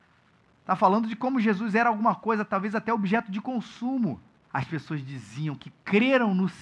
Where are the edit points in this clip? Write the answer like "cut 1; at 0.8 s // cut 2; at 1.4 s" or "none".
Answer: cut 1; at 4.5 s